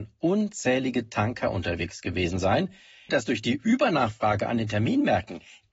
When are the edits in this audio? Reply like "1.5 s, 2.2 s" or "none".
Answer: 3.1 s